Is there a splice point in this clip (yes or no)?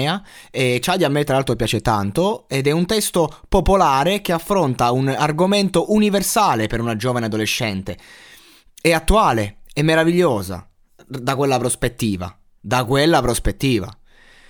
no